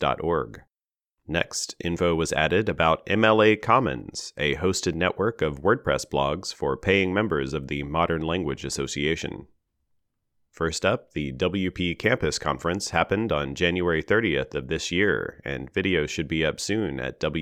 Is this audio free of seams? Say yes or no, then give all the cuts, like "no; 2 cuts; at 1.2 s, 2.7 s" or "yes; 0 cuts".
no; 1 cut; at 10.5 s